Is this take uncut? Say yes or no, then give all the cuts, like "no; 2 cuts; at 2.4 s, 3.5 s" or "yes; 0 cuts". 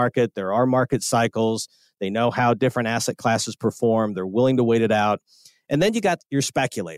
yes; 0 cuts